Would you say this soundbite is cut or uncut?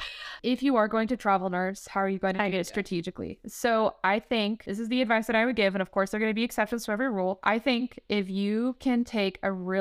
uncut